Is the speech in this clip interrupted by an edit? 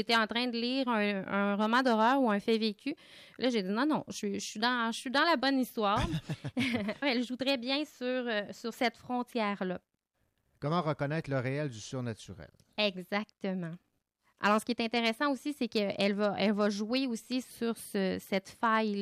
yes; 1 cut; at 7.0 s

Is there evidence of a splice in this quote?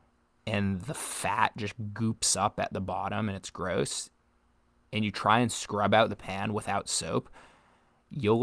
no; 0 cuts

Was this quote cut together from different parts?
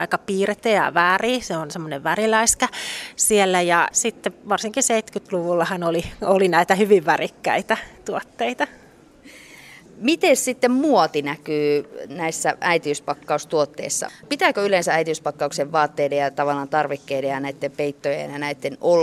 yes; 2 cuts; at 3.9 s, 14.1 s

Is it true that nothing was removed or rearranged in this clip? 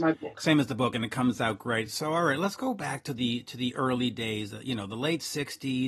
yes; 0 cuts

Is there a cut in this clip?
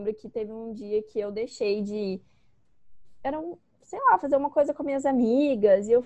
no; 0 cuts

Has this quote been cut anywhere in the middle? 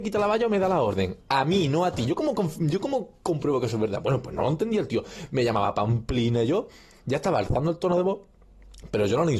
no; 0 cuts

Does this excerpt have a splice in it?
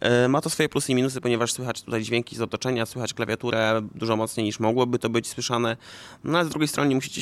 no; 0 cuts

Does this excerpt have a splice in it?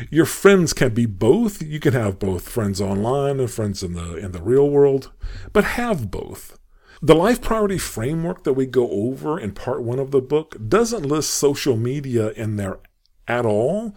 no; 0 cuts

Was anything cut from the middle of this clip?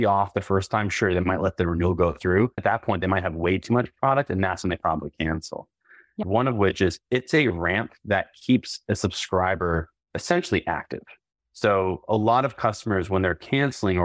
yes; 2 cuts; at 2.6 s, 6.2 s

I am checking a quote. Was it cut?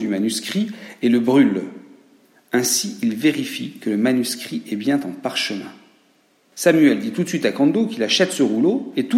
no; 0 cuts

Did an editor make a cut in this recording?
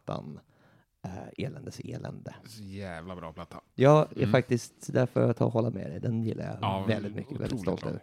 no; 0 cuts

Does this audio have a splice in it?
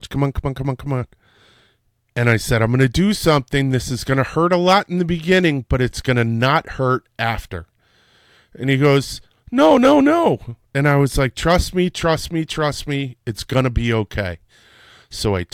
no; 0 cuts

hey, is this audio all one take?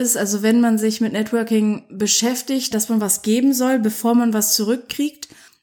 no; 1 cut; at 2.7 s

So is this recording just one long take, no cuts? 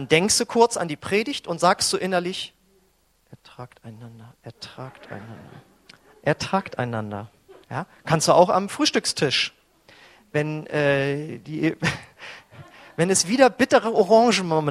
no; 2 cuts; at 7.6 s, 12.1 s

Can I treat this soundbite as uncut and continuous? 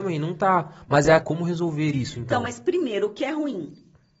no; 1 cut; at 1.2 s

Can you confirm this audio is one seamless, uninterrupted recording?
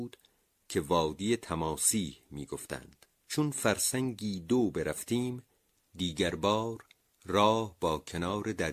no; 1 cut; at 3.2 s

